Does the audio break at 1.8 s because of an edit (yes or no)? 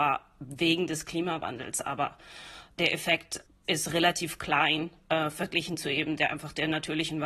no